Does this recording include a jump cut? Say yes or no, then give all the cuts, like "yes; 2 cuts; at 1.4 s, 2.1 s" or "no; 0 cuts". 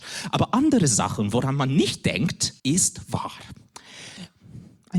yes; 1 cut; at 2.6 s